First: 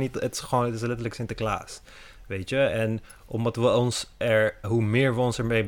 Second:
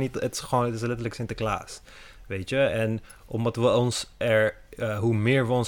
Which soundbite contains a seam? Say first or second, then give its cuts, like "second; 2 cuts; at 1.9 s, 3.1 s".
first; 1 cut; at 4.6 s